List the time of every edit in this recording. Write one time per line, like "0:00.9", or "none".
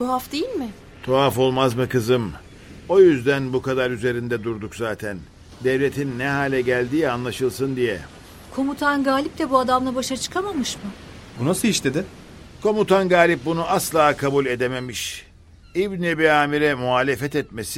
0:11.3